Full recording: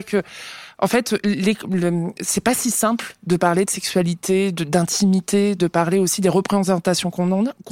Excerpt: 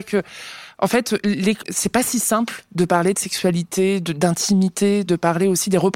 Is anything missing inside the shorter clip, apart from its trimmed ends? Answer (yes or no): yes